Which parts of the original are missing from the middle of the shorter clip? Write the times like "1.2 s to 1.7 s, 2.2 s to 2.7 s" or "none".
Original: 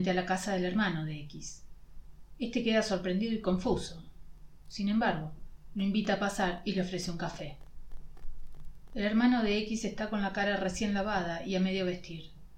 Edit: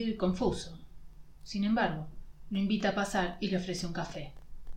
none